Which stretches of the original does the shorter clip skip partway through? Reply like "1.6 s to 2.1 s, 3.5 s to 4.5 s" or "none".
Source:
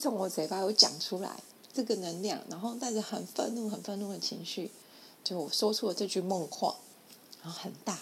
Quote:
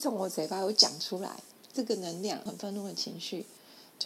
2.5 s to 3.7 s